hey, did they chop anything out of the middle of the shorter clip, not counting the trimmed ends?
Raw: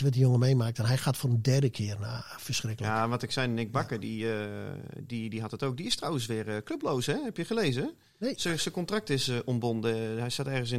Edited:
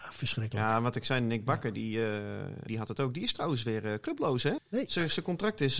yes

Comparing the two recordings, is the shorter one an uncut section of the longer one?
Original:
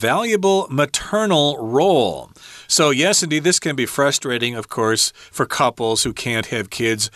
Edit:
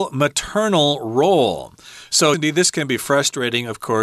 no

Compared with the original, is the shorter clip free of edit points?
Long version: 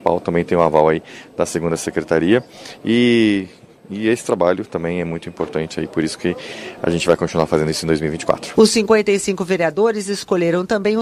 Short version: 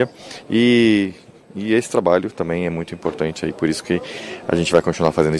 yes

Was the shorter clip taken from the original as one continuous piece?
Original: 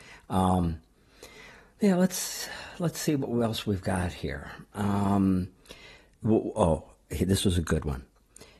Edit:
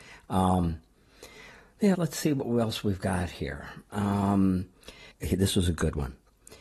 no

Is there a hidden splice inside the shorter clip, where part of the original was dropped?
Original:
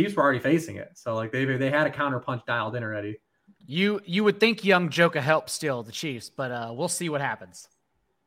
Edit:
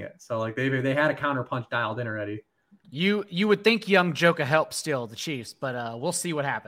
no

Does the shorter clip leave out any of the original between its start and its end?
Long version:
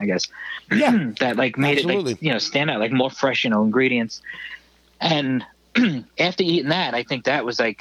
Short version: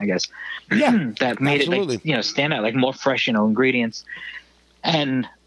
yes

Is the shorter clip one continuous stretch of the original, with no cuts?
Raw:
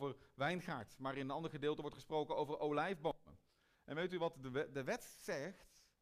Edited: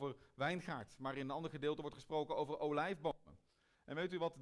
yes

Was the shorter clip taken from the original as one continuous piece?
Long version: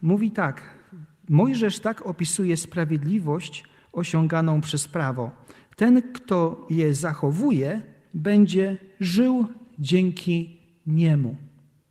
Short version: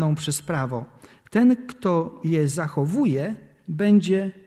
yes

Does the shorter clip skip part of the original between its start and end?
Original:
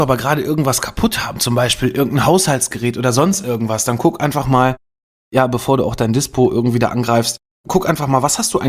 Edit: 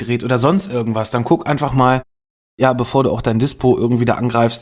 no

